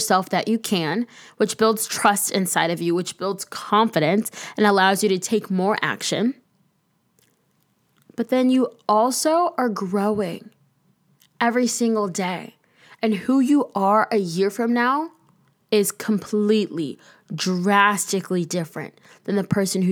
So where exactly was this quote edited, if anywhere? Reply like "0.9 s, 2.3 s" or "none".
none